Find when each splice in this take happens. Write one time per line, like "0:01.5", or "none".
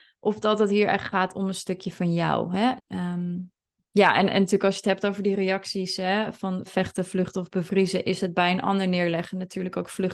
0:02.8
0:06.7

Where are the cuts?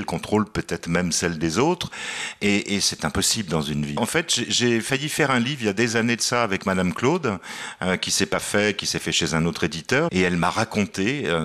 0:04.0
0:10.1

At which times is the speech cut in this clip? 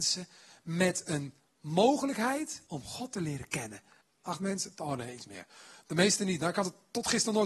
0:02.7
0:04.0

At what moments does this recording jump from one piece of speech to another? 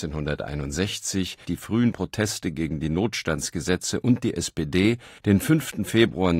0:01.4
0:05.2

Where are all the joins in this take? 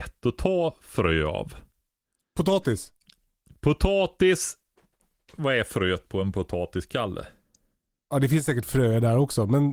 none

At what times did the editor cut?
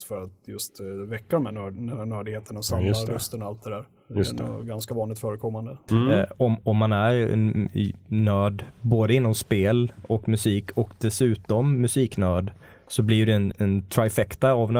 0:05.9
0:13.5

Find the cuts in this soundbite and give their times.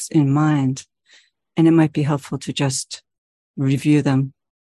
none

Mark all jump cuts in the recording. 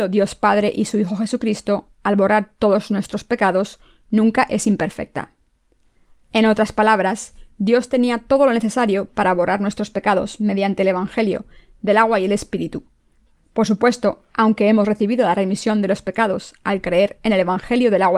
0:06.2
0:13.4

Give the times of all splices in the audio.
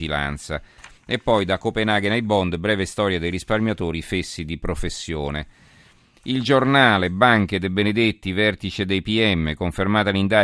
0:01.0

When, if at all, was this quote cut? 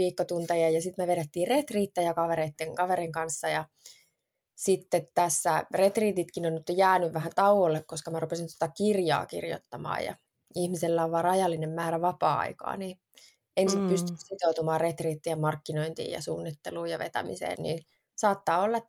0:17.6

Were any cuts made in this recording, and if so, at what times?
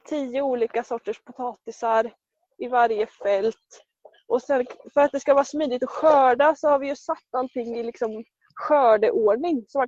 0:04.1

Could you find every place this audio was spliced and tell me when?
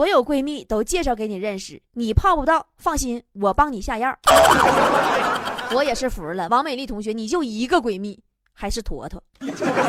none

